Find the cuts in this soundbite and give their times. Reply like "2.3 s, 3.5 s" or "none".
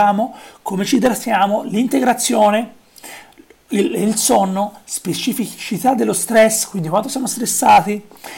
none